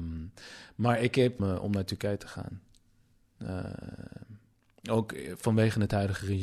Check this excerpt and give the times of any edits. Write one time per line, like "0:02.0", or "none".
0:01.4